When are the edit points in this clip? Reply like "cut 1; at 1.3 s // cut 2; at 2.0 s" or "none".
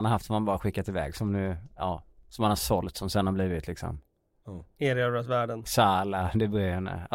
none